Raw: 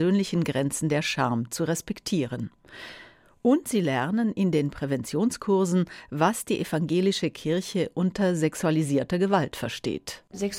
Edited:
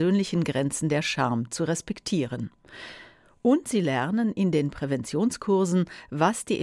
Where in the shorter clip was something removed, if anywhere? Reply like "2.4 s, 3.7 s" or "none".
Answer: none